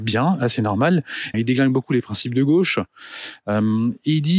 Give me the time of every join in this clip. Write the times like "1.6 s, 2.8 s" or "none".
1.3 s